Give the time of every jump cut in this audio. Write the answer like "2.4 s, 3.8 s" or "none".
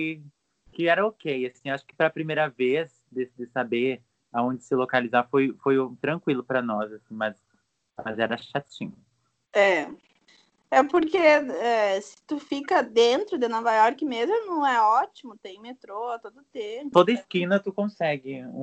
16.9 s